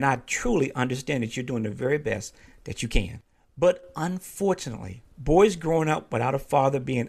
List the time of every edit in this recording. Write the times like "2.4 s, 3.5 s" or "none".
5.1 s